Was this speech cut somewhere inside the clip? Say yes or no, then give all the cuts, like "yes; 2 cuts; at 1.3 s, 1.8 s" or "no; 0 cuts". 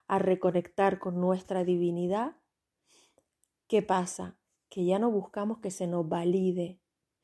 no; 0 cuts